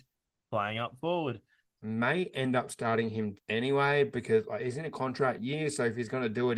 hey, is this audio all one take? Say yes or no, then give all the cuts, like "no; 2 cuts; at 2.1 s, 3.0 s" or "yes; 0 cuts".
no; 2 cuts; at 1.6 s, 3.4 s